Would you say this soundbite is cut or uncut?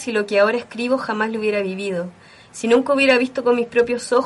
uncut